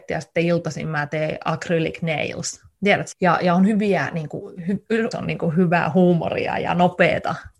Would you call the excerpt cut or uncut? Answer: cut